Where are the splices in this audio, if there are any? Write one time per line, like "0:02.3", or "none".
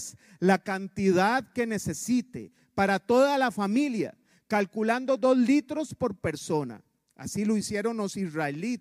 none